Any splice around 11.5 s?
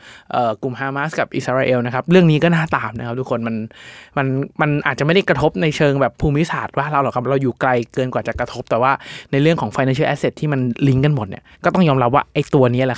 yes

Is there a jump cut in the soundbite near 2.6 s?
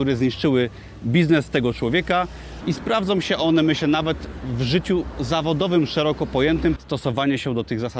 yes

